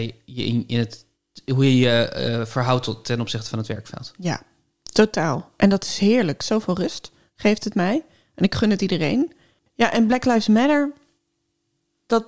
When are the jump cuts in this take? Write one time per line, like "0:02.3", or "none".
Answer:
none